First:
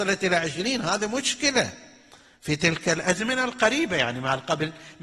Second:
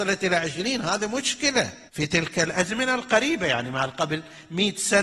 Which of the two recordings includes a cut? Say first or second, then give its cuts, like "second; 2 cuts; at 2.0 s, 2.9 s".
second; 1 cut; at 1.9 s